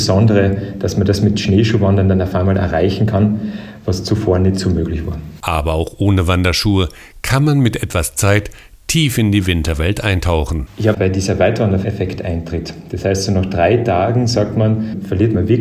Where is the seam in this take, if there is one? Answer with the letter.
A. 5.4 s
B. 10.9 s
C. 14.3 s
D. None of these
B